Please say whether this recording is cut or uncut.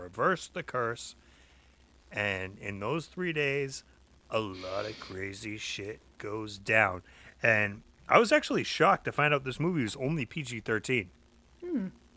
uncut